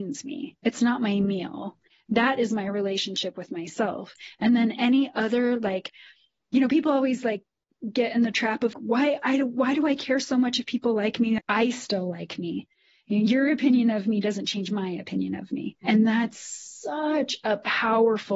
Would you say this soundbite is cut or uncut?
cut